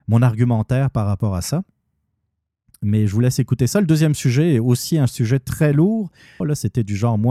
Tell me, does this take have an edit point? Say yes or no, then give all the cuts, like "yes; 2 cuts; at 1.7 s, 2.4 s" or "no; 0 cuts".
yes; 1 cut; at 6.4 s